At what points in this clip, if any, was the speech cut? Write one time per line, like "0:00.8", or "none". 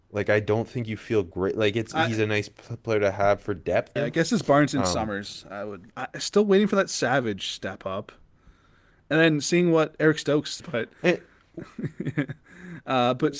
0:04.0
0:05.9
0:10.6